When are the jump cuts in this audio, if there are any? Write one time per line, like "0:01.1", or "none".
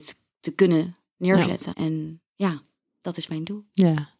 0:01.7